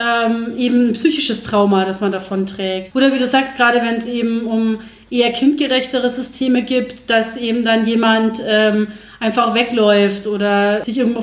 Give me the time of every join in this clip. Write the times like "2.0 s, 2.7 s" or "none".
none